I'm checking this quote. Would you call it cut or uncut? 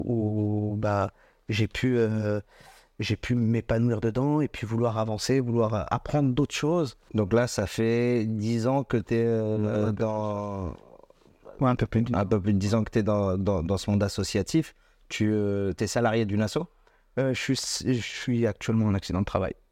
cut